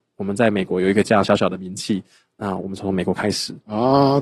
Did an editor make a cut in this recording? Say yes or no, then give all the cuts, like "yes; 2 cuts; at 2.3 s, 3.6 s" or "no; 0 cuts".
no; 0 cuts